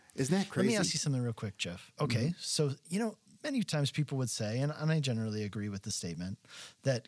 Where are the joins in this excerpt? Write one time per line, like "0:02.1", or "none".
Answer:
none